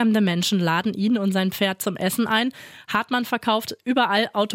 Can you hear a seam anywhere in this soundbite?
no; 0 cuts

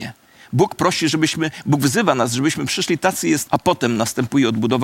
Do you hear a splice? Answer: yes; 1 cut; at 3.5 s

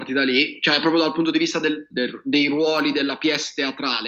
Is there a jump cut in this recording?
yes; 1 cut; at 1.9 s

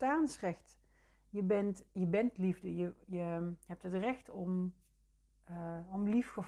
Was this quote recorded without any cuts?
yes; 0 cuts

